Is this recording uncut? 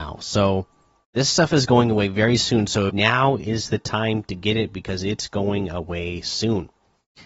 no; 2 cuts; at 1.0 s, 2.9 s

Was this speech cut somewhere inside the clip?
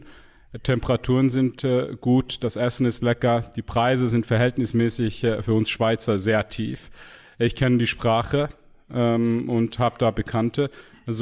no; 0 cuts

